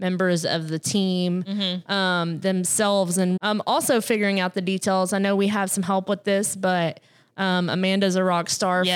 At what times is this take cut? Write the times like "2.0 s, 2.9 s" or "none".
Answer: 3.4 s